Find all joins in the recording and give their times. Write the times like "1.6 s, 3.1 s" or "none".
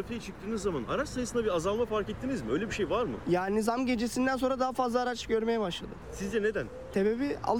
none

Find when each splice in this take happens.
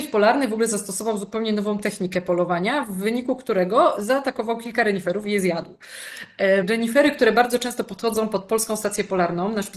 6.6 s

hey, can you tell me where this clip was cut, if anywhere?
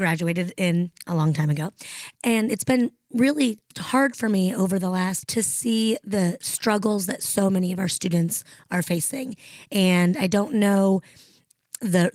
2.1 s, 3.7 s, 5.2 s

